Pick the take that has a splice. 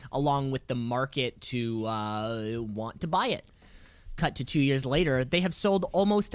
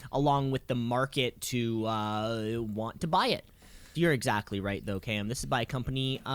second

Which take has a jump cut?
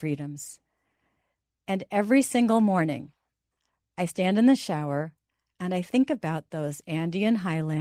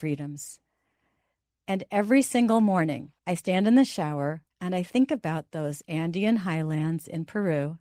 second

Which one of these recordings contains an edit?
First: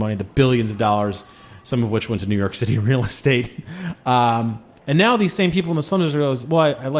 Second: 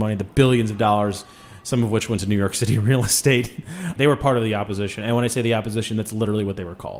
second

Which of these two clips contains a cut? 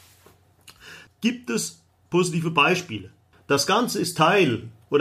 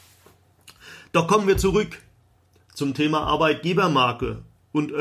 first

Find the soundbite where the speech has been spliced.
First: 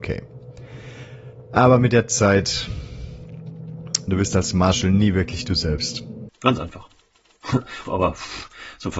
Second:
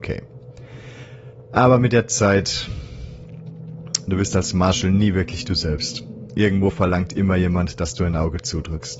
first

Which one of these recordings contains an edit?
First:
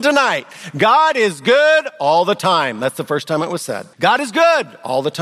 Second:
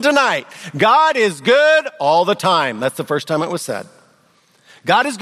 first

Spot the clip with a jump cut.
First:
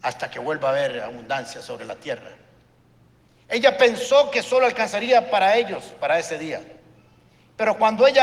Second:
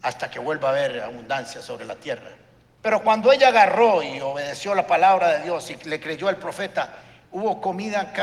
second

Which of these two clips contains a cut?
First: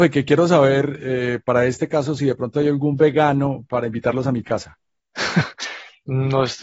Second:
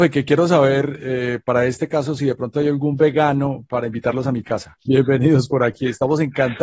second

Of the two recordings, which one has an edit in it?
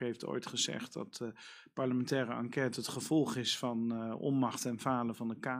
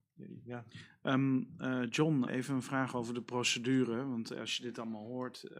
second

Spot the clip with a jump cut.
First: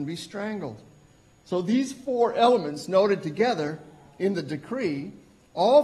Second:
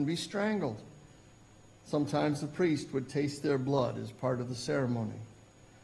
first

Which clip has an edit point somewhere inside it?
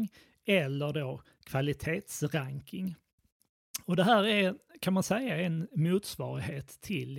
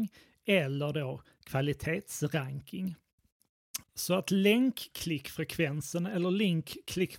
second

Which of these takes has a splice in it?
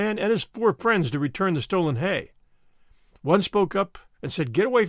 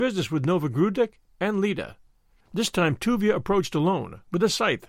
second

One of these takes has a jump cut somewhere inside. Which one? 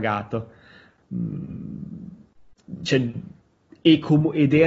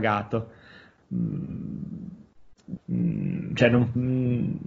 second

